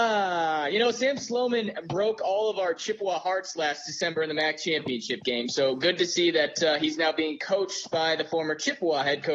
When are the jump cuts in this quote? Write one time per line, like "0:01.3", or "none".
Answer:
none